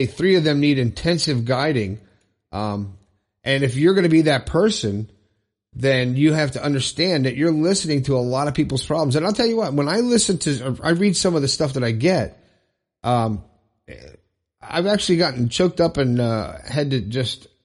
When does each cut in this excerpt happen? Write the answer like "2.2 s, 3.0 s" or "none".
none